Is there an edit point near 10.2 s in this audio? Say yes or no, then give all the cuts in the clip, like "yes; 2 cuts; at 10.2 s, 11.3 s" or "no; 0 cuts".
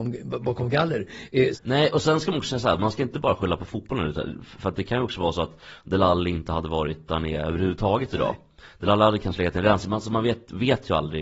no; 1 cut; at 1.5 s